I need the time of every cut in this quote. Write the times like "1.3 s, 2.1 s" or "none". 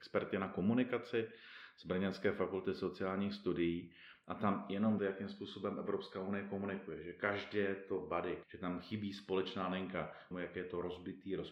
5.0 s, 8.4 s, 10.3 s